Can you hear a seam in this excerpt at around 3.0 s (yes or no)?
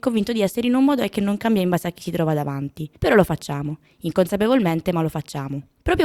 yes